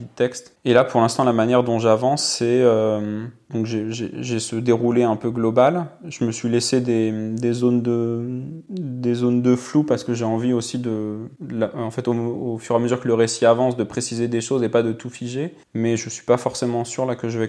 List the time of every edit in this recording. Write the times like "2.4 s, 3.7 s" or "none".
15.7 s